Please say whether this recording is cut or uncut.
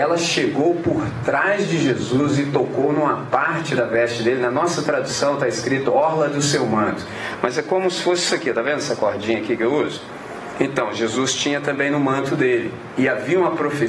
uncut